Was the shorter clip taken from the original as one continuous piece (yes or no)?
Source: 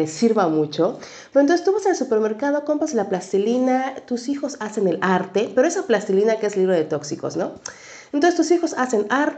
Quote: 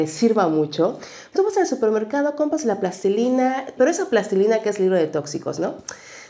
no